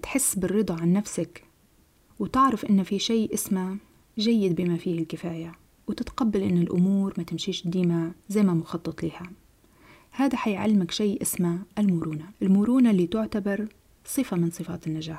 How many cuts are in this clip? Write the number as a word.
one